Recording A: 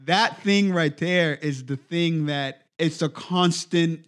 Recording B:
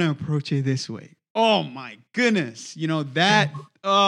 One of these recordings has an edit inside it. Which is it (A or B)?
A